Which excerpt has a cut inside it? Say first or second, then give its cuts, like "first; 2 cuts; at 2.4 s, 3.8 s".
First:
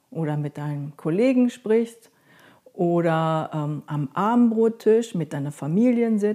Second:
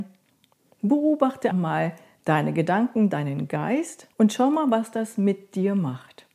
second; 2 cuts; at 1.5 s, 4.1 s